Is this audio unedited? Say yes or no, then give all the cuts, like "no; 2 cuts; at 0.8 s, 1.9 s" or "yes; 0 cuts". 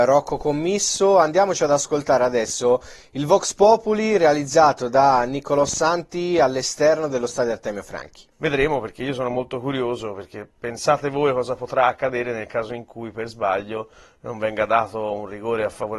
no; 1 cut; at 8.3 s